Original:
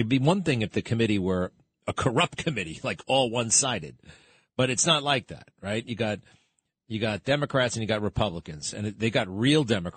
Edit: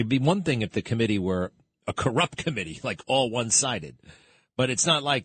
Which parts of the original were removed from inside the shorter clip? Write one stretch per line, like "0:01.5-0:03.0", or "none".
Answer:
none